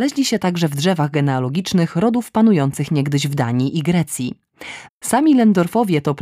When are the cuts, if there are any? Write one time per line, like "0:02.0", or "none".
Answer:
0:04.9